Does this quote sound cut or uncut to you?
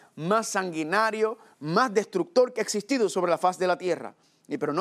cut